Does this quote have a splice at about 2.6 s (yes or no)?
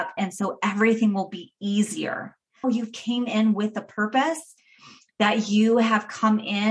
yes